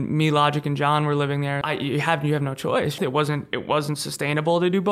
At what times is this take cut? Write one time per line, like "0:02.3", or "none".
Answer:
0:01.6
0:03.0